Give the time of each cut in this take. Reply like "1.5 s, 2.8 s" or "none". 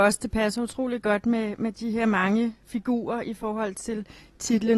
none